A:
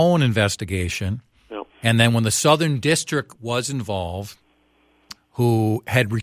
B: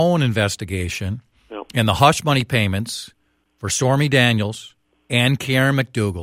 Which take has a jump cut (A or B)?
A